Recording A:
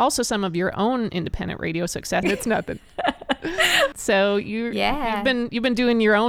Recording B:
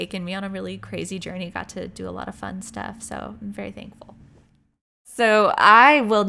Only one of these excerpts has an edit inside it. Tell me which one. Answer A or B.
A